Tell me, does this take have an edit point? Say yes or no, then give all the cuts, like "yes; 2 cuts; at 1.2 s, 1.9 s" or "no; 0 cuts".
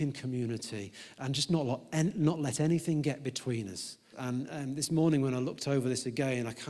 yes; 1 cut; at 4.1 s